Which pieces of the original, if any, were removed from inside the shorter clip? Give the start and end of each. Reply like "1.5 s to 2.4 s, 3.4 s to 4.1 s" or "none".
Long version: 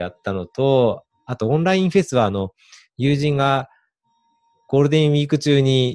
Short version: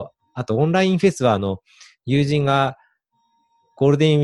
none